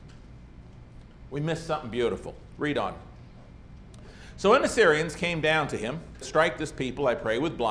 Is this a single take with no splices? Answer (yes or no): no